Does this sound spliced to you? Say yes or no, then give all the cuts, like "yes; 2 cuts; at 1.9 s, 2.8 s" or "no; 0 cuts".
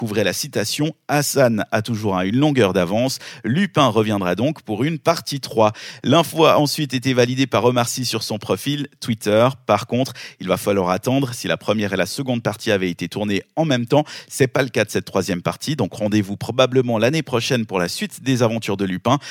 no; 0 cuts